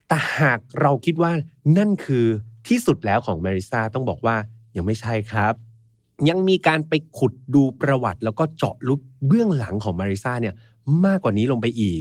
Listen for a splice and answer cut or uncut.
uncut